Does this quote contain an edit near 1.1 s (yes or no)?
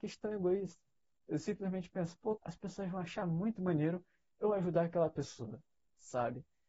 no